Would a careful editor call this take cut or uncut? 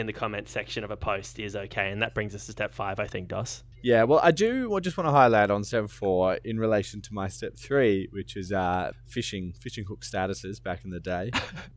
cut